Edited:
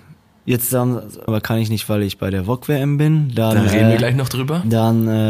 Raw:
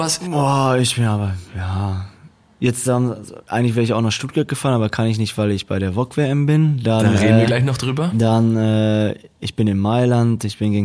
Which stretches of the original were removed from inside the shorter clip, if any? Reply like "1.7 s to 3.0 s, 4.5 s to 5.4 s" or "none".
3.4 s to 4.8 s